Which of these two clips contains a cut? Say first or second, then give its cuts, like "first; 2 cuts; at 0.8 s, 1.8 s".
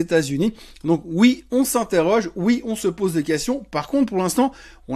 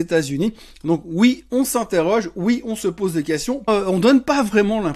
second; 1 cut; at 3.7 s